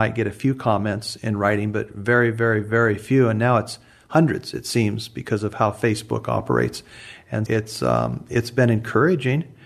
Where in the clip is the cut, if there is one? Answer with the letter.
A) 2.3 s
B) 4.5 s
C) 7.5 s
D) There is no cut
C